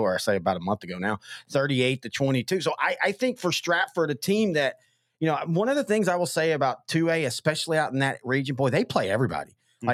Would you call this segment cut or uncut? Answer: uncut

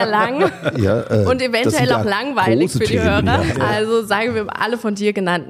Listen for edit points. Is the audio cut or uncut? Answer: cut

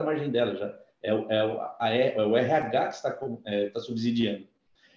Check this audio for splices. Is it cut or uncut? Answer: uncut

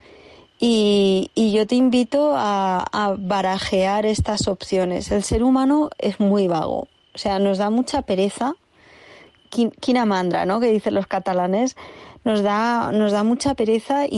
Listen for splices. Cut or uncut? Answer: uncut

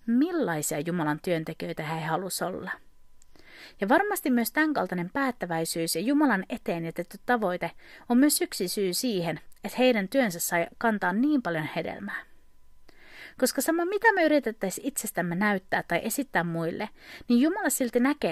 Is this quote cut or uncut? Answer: uncut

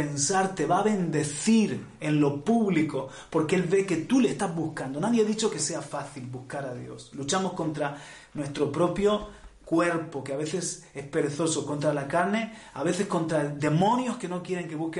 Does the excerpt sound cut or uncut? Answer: uncut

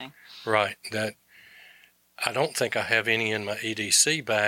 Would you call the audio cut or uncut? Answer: uncut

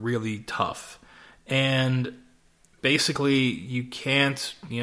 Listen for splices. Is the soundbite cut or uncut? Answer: uncut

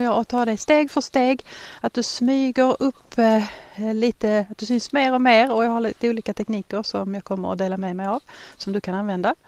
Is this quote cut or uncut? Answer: uncut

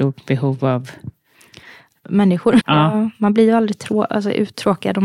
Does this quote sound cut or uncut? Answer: cut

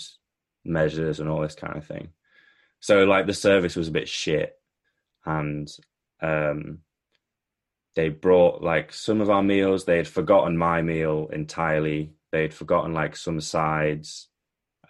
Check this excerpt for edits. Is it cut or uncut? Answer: uncut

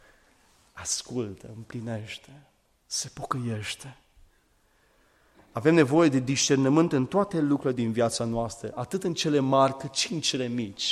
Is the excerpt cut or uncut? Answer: uncut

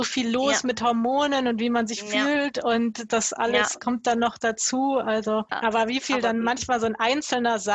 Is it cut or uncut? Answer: uncut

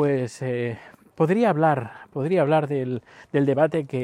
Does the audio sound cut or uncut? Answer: cut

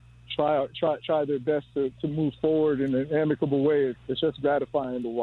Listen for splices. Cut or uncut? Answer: cut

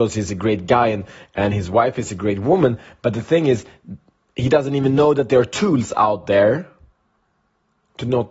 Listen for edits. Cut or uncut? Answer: uncut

